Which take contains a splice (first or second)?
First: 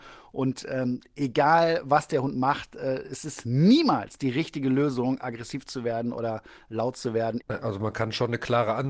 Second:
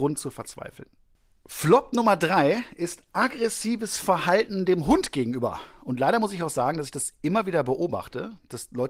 first